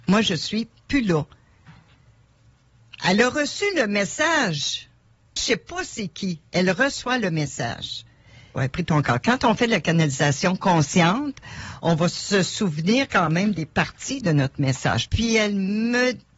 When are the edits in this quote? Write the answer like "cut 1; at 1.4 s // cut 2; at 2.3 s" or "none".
cut 1; at 5.4 s // cut 2; at 8.6 s // cut 3; at 15.1 s